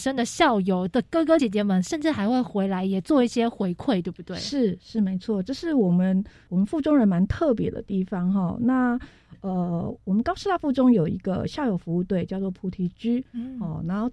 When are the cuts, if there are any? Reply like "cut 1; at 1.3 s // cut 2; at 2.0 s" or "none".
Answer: cut 1; at 1.4 s

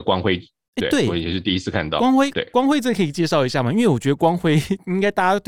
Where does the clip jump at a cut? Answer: none

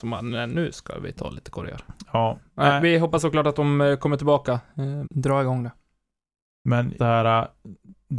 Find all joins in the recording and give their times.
cut 1; at 5.0 s // cut 2; at 7.0 s

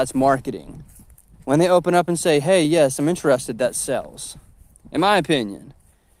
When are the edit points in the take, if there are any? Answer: none

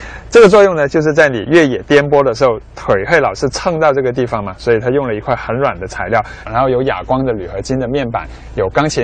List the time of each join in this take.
cut 1; at 6.4 s

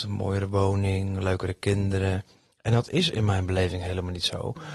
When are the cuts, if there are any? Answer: none

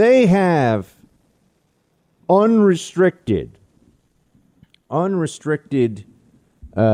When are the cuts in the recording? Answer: none

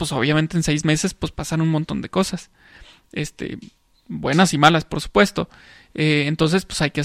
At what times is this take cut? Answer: none

